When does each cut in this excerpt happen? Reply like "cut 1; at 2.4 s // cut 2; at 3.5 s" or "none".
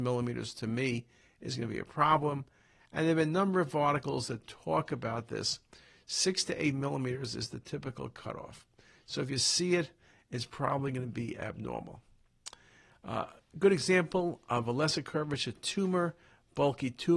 none

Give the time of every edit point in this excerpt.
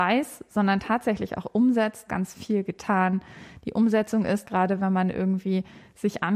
cut 1; at 2.1 s // cut 2; at 4.4 s

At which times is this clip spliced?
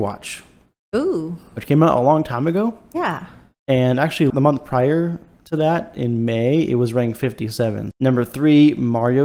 cut 1; at 4.3 s // cut 2; at 7.9 s

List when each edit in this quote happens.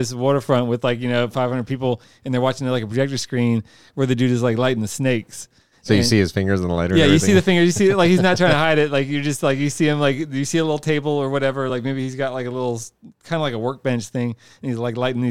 none

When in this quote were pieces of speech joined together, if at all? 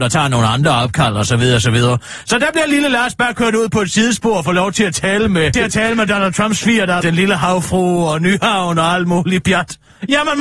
cut 1; at 5.5 s // cut 2; at 7.0 s

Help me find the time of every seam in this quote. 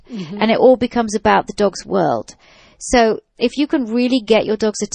none

